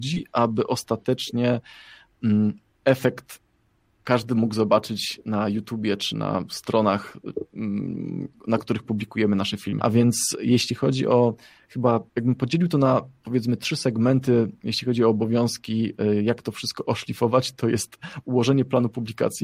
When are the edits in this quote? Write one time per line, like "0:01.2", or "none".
0:09.8
0:12.1